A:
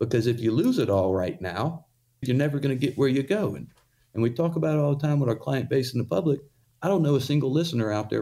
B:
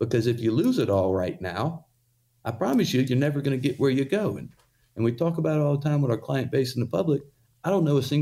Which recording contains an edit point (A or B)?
A